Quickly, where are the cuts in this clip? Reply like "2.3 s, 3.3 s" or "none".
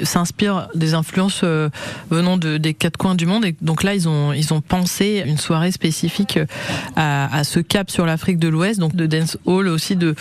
5.2 s, 8.9 s